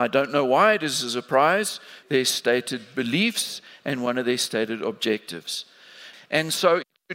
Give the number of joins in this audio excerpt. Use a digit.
2